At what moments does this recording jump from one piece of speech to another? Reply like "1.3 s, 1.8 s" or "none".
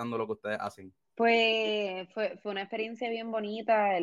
1.0 s